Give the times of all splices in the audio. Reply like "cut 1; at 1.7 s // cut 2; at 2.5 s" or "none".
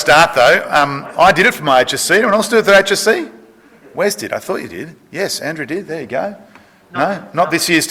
none